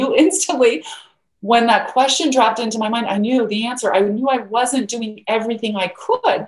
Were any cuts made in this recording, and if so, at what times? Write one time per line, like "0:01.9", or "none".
none